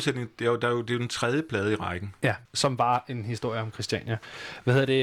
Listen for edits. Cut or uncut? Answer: cut